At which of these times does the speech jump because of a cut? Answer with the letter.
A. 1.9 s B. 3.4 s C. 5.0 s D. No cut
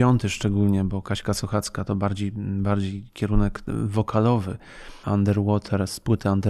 C